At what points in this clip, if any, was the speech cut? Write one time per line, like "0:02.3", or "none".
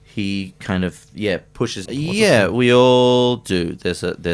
0:01.8